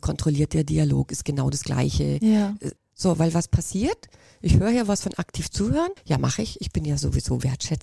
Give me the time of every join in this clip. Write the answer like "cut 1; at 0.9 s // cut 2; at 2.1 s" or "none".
cut 1; at 2.8 s // cut 2; at 6.0 s